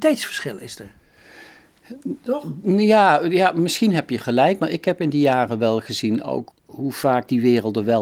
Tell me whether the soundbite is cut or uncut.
cut